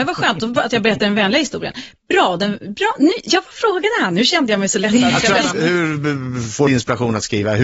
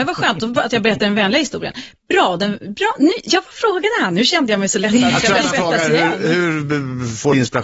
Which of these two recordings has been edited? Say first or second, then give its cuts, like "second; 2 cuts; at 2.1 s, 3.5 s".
first; 1 cut; at 5.5 s